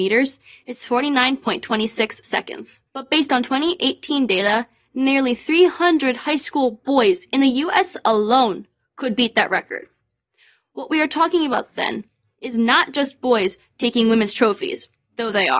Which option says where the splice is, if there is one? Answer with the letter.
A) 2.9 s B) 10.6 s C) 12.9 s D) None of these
A